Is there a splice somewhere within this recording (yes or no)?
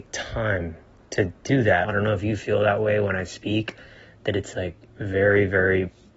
yes